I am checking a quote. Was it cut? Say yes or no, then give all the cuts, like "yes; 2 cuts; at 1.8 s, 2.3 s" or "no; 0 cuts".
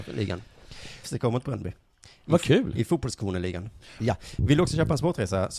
yes; 2 cuts; at 1.0 s, 4.0 s